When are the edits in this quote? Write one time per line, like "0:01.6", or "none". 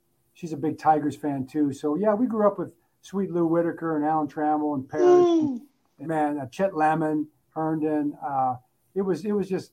0:06.0
0:07.4